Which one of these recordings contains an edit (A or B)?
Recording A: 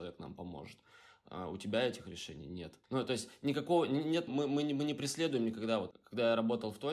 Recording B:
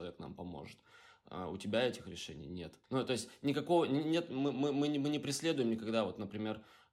A